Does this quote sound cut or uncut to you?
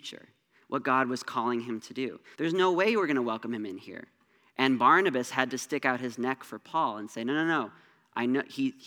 cut